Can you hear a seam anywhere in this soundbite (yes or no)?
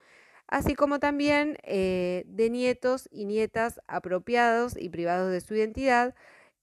no